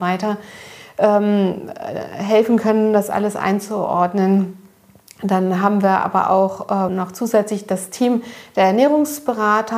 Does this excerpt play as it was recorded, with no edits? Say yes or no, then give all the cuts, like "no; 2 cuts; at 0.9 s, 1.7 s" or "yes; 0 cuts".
no; 1 cut; at 6.9 s